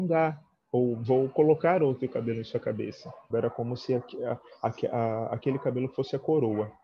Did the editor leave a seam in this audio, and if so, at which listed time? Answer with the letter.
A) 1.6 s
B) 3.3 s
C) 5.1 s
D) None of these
B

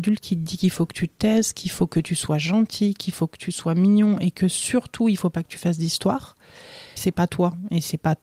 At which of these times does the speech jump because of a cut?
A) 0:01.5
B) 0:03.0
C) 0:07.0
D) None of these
C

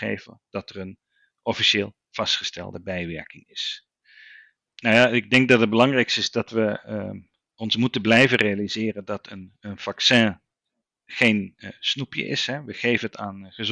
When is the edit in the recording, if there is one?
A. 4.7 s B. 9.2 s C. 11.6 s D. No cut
A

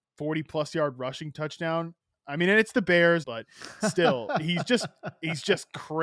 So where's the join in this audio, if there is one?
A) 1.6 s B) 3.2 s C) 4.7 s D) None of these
B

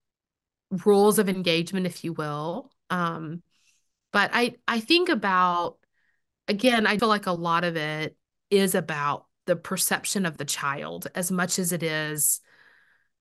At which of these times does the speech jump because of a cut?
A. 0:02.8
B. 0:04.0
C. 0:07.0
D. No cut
C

